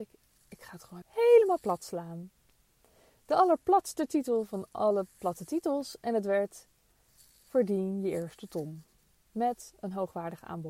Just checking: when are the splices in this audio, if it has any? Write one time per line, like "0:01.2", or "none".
0:01.0